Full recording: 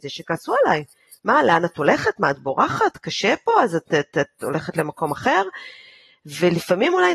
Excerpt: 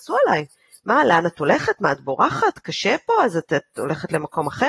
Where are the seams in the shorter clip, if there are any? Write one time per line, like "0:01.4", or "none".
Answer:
0:03.5